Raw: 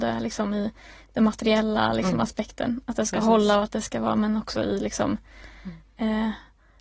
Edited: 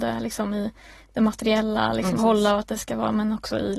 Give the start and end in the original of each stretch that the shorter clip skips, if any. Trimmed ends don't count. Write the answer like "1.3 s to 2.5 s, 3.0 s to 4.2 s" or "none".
2.2 s to 3.2 s